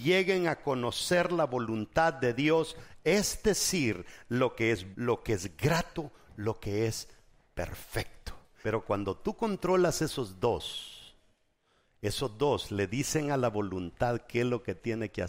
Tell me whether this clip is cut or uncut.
cut